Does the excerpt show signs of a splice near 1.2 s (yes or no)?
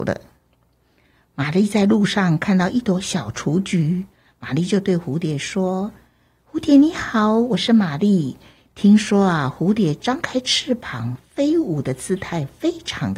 no